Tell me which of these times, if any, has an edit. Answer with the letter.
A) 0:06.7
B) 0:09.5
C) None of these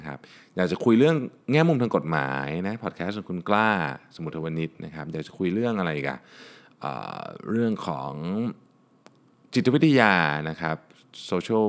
C